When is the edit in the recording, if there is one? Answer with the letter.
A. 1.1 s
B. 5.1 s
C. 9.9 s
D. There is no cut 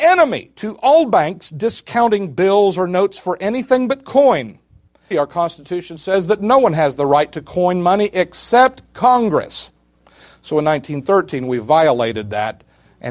B